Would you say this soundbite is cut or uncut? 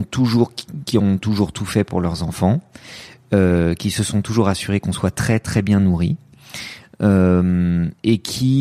uncut